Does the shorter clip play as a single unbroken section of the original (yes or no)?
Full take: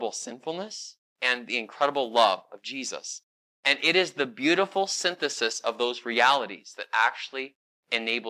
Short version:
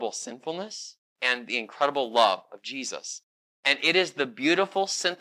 yes